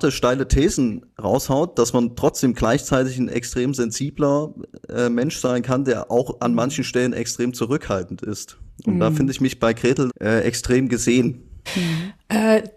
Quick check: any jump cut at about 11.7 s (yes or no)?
yes